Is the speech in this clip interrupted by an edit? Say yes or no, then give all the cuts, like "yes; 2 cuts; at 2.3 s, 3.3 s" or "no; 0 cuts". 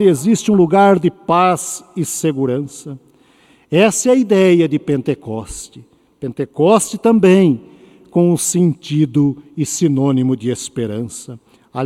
no; 0 cuts